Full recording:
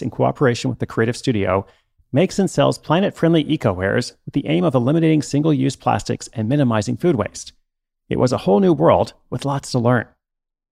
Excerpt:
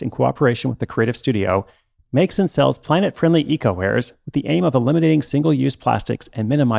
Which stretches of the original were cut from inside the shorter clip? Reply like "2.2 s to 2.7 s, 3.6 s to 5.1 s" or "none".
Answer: none